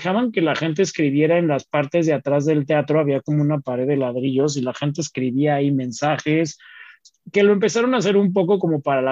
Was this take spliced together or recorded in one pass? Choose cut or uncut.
uncut